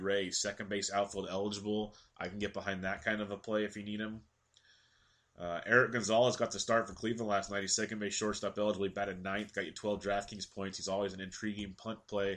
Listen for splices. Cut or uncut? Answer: uncut